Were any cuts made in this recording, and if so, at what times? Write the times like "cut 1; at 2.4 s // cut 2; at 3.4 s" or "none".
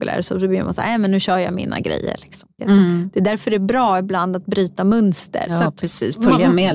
cut 1; at 2.6 s // cut 2; at 5.5 s